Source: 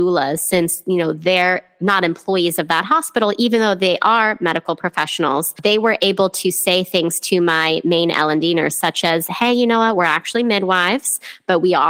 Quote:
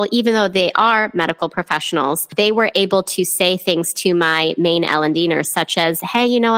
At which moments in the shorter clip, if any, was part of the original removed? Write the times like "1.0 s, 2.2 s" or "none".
none